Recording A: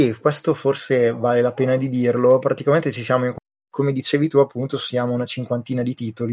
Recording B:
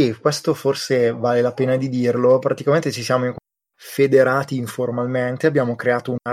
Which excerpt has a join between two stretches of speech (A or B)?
A